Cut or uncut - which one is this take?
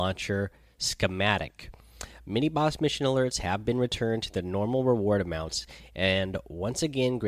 uncut